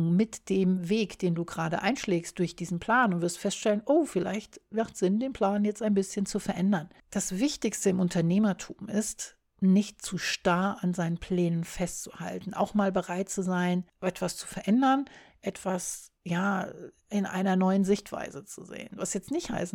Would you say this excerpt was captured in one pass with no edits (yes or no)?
no